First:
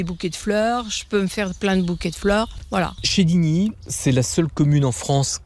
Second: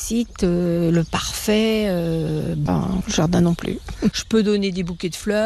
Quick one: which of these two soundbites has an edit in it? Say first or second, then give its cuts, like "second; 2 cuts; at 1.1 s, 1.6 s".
second; 2 cuts; at 2.7 s, 4.1 s